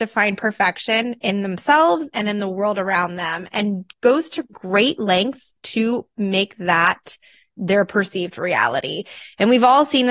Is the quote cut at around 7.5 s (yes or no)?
no